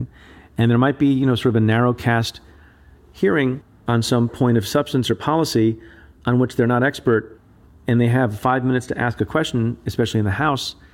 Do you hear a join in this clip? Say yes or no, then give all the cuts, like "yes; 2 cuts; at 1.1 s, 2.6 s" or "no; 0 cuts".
no; 0 cuts